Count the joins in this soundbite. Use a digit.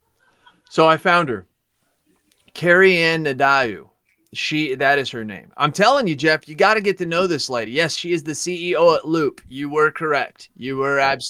0